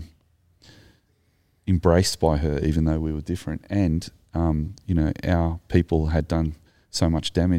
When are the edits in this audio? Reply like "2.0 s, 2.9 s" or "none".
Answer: none